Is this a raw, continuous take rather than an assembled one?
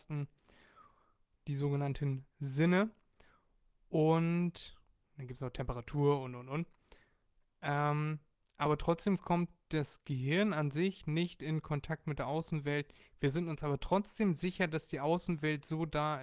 yes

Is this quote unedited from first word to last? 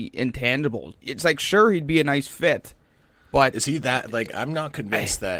no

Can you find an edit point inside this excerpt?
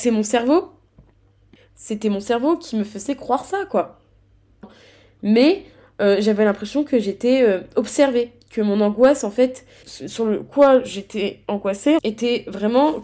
yes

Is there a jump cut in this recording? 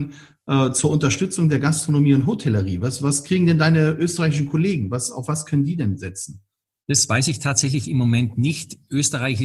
no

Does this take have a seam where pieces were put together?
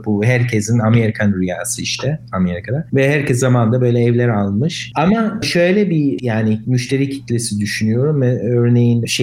yes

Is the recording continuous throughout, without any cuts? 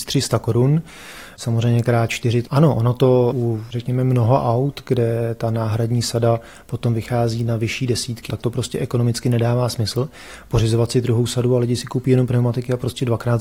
no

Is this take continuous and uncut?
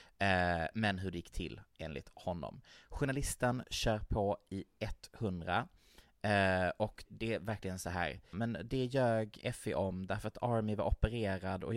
no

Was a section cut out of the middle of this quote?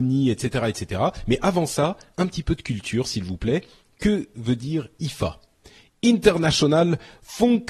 no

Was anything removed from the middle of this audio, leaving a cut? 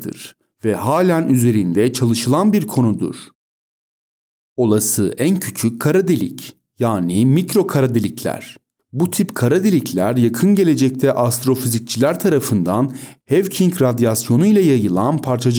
yes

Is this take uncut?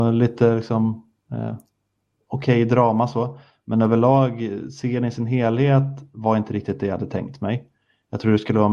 yes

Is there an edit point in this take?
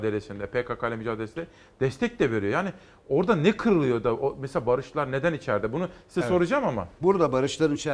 no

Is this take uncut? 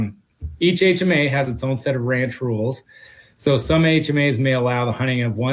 yes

